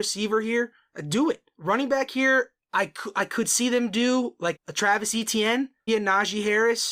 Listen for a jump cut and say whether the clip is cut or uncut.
cut